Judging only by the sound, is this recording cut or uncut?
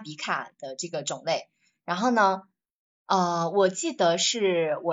uncut